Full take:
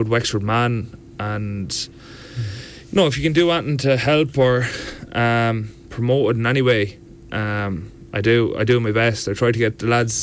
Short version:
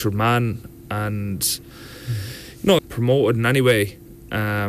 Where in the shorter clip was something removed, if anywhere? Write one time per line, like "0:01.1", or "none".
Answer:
0:02.8